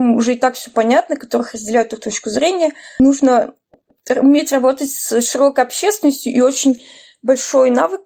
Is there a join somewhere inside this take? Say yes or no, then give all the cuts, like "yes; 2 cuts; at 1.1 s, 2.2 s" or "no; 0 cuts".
no; 0 cuts